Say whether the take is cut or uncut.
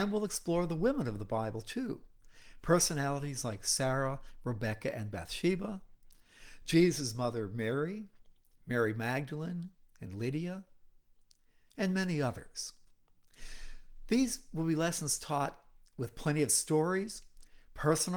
uncut